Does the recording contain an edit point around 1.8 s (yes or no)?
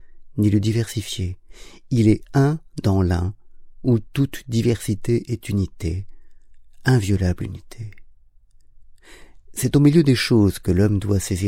no